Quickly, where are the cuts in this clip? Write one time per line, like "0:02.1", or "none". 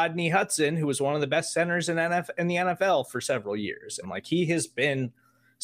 0:04.0